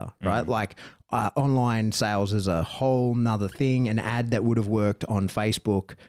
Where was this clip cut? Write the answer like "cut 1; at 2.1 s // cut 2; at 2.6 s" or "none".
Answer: none